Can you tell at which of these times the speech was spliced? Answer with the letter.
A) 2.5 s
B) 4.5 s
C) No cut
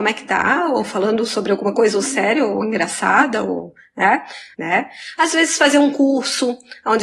B